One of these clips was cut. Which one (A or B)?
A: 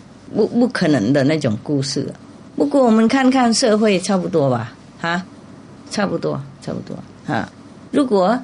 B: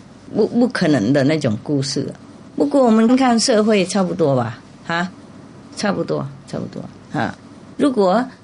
B